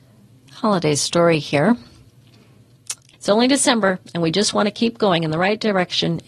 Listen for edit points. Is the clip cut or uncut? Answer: cut